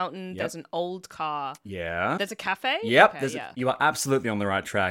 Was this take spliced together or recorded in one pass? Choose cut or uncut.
cut